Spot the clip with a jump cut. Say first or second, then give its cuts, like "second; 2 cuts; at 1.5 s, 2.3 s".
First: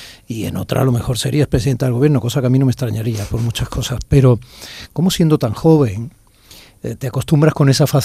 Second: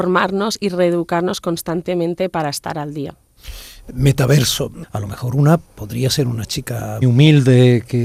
second; 2 cuts; at 4.8 s, 7.0 s